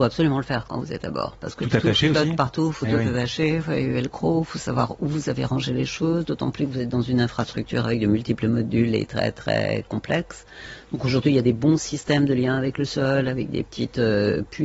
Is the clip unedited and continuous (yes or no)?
yes